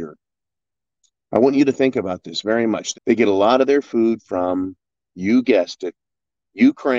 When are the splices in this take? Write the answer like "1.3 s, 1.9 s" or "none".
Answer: 2.9 s